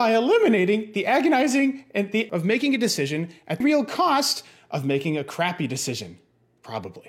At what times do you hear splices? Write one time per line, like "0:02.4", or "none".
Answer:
0:02.3
0:03.6